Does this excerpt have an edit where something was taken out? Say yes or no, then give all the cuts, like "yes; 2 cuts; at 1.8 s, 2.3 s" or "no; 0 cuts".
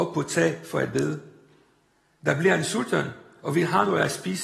no; 0 cuts